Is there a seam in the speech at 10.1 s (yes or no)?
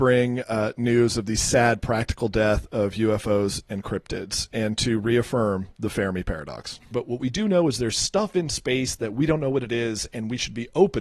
no